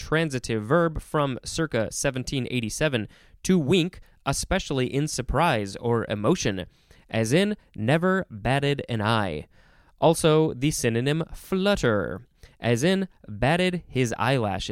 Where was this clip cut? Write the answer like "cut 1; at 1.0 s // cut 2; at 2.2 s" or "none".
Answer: none